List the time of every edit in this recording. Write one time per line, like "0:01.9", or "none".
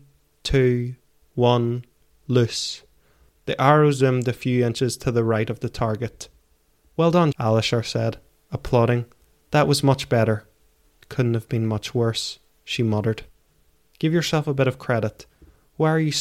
0:07.3